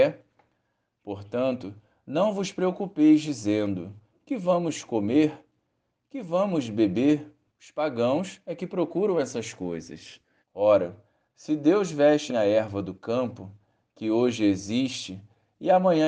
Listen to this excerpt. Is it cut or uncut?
cut